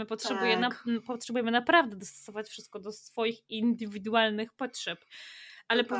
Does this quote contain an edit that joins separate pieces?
no; 0 cuts

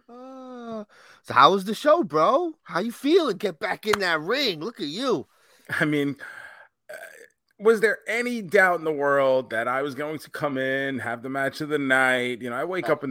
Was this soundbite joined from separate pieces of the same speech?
no; 0 cuts

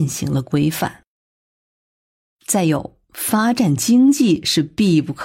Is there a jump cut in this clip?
no; 0 cuts

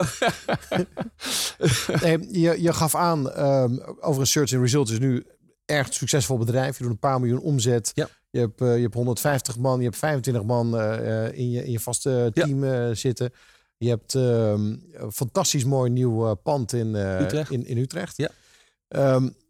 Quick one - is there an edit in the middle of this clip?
no; 0 cuts

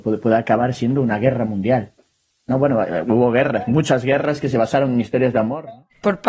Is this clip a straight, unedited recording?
yes; 0 cuts

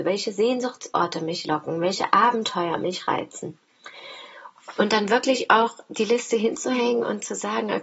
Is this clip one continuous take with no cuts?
no; 1 cut; at 4.8 s

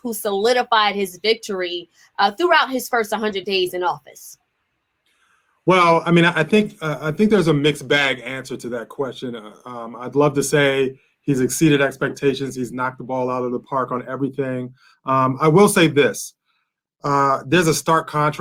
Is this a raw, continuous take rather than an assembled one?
yes; 0 cuts

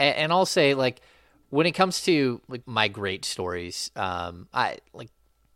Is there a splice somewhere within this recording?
yes; 1 cut; at 2.6 s

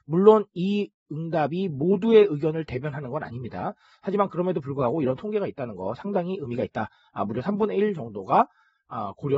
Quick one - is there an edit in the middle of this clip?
no; 0 cuts

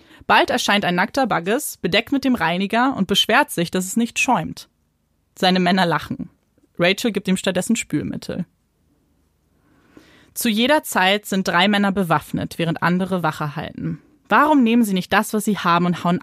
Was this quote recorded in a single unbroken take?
yes; 0 cuts

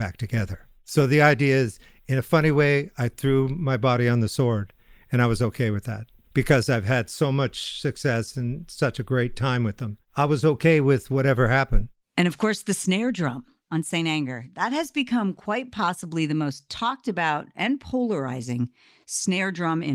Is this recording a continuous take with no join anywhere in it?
yes; 0 cuts

